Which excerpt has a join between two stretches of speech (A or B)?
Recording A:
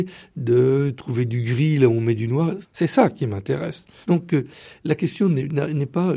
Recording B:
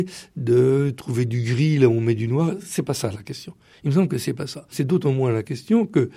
A